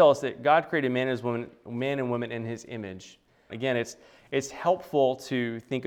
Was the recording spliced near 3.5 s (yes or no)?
yes